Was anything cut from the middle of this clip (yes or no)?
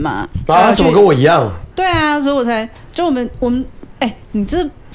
no